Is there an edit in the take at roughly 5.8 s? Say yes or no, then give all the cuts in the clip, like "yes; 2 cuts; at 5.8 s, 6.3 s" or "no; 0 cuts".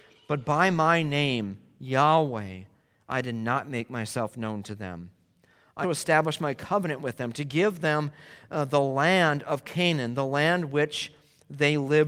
yes; 1 cut; at 5.8 s